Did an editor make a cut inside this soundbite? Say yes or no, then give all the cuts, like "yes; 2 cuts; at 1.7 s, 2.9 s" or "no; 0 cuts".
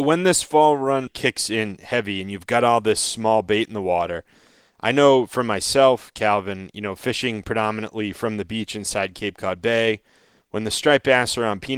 yes; 1 cut; at 1.1 s